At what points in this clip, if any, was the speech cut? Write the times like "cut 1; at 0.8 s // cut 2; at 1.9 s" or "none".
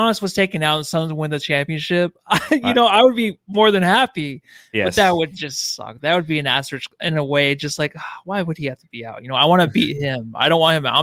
none